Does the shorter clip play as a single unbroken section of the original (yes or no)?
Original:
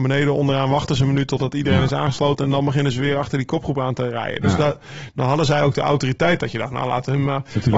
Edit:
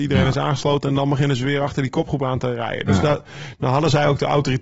yes